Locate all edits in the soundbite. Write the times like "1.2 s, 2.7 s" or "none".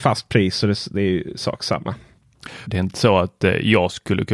2.7 s